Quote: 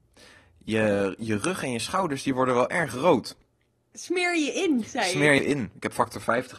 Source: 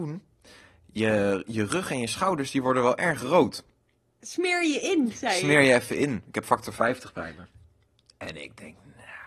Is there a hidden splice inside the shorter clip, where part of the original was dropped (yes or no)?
yes